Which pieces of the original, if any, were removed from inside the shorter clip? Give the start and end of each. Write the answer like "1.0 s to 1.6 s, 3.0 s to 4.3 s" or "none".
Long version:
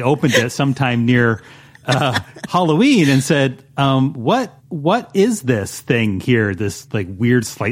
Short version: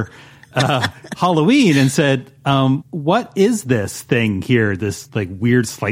4.1 s to 4.6 s